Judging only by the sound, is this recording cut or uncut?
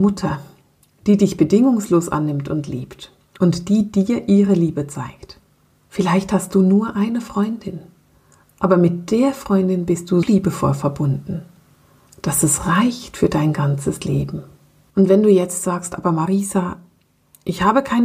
cut